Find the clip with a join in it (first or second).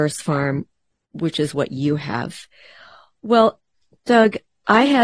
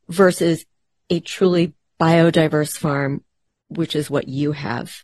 first